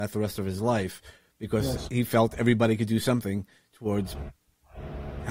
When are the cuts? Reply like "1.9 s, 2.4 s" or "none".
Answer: none